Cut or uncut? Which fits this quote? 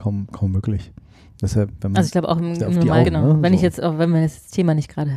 cut